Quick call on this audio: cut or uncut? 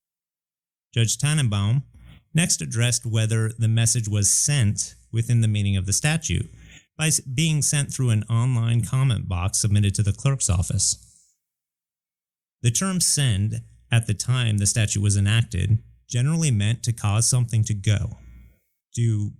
uncut